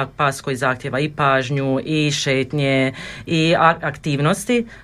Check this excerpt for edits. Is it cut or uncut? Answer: uncut